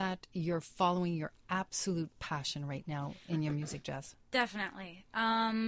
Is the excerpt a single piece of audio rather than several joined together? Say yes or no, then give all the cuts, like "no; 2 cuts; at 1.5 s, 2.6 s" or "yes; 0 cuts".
yes; 0 cuts